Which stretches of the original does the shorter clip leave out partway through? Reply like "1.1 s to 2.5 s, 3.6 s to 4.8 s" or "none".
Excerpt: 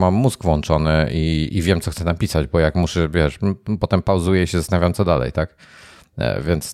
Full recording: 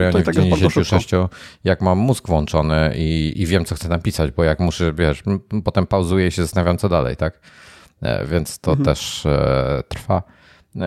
none